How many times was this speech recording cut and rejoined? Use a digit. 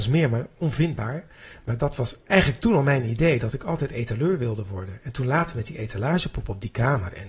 1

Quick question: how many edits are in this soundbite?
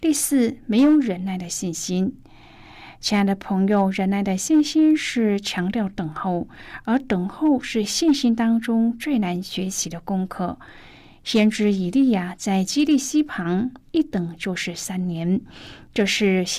0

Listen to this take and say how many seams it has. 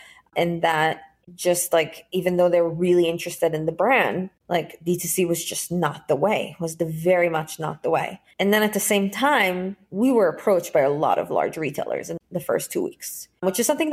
1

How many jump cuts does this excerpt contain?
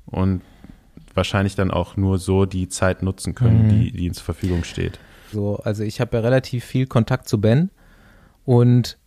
1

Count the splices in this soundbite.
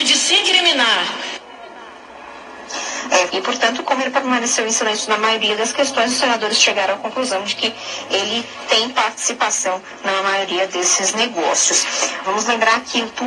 2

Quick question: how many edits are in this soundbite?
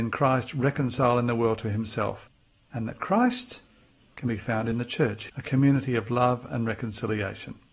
1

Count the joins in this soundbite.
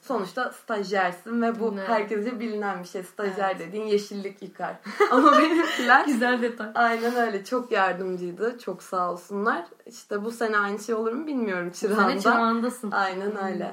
0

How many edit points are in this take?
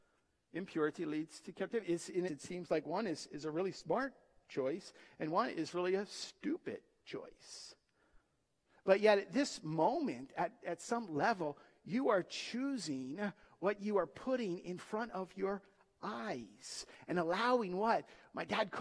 1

